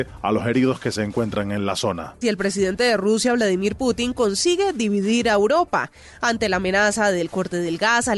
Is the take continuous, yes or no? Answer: no